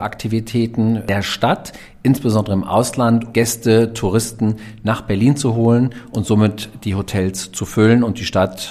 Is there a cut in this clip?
yes; 1 cut; at 3.3 s

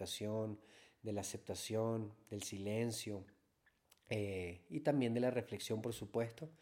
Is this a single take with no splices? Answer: yes; 0 cuts

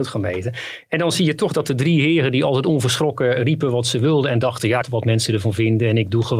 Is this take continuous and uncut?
no; 1 cut; at 4.8 s

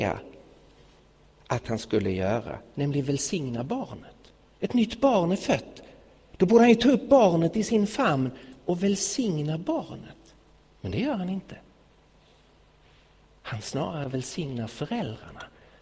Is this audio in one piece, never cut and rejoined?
yes; 0 cuts

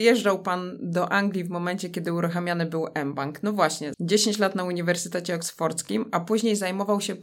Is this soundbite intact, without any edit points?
no; 1 cut; at 3.9 s

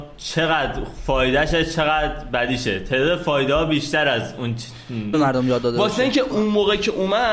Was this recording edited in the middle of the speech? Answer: yes; 2 cuts; at 5.1 s, 6.3 s

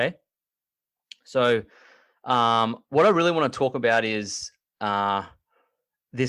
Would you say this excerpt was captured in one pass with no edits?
yes; 0 cuts

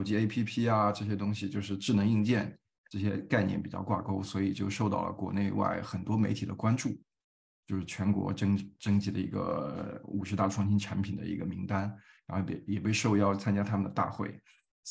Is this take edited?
yes; 1 cut; at 7.6 s

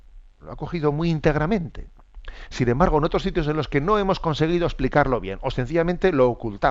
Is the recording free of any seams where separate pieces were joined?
yes; 0 cuts

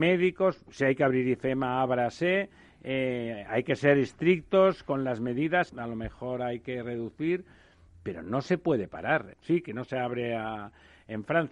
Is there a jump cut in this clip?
yes; 2 cuts; at 5.7 s, 9.3 s

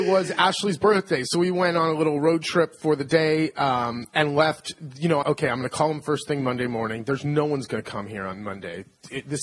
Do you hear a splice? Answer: yes; 1 cut; at 5.2 s

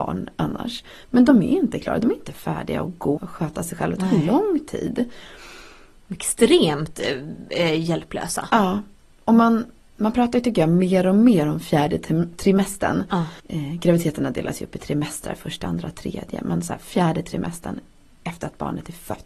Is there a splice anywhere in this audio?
yes; 2 cuts; at 3.2 s, 13.4 s

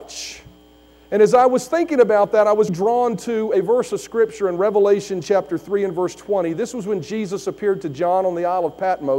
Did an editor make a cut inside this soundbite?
yes; 1 cut; at 2.7 s

